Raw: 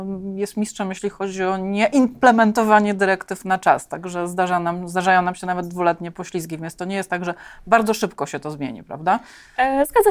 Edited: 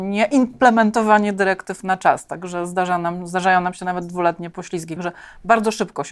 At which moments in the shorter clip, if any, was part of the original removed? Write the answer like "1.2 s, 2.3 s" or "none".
5.0 s

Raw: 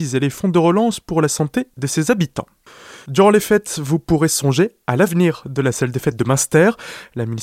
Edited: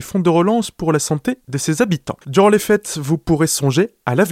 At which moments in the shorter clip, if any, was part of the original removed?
2.2 s

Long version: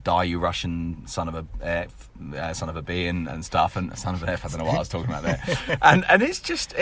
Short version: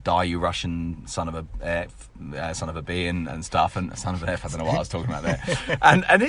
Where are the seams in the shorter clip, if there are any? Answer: none

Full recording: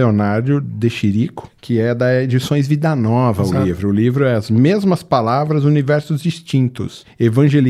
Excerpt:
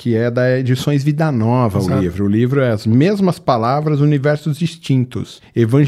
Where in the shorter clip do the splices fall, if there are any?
none

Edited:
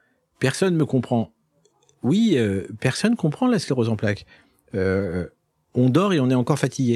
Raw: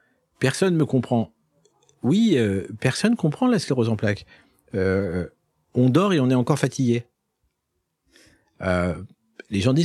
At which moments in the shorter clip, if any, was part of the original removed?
none

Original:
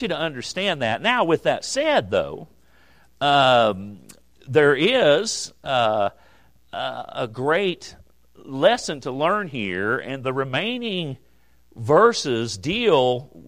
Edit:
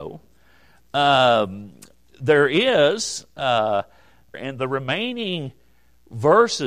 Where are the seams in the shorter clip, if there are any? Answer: 4.3 s

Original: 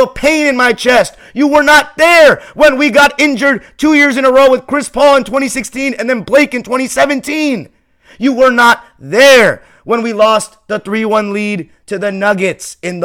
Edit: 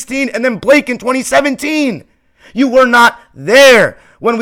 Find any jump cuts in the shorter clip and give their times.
none

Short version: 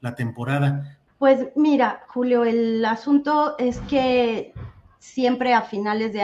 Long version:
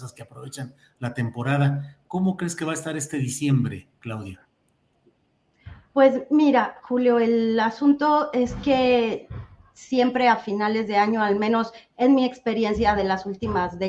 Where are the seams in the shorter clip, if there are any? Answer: 1.1 s

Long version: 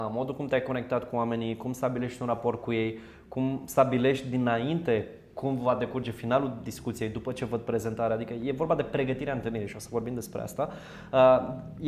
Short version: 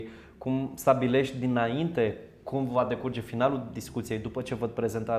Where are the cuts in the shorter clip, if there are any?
none

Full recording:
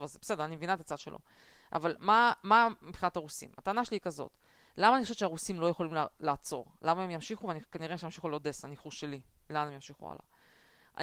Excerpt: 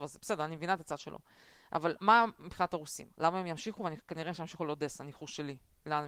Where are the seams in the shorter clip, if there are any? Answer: 2.0 s, 3.1 s

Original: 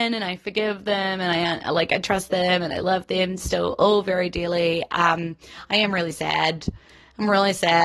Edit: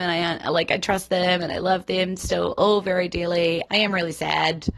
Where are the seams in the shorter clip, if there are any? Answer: 3.7 s

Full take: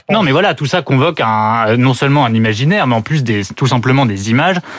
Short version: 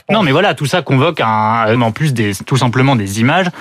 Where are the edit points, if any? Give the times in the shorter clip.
1.8 s

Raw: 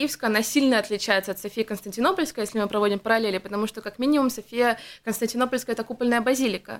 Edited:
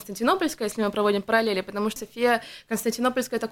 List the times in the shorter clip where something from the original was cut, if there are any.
2.0 s

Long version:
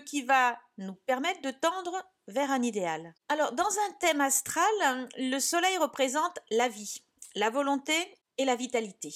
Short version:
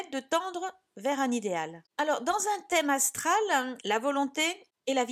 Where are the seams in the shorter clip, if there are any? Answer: 3.8 s

